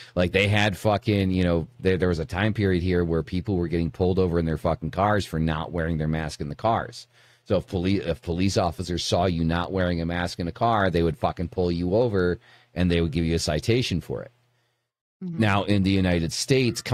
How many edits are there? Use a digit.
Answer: 0